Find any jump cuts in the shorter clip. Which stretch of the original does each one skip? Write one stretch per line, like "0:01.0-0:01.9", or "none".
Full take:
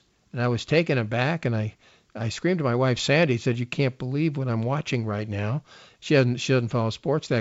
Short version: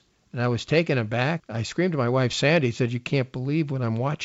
0:01.4-0:02.1